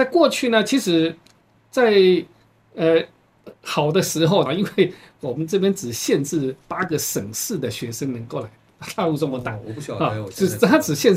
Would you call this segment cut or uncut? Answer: cut